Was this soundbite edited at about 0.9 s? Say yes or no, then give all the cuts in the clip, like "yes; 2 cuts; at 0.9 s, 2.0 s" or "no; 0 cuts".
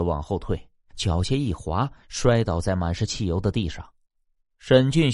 yes; 1 cut; at 0.9 s